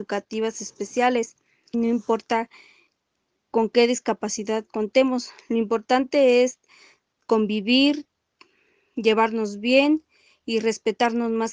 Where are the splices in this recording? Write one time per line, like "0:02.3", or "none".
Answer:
0:01.7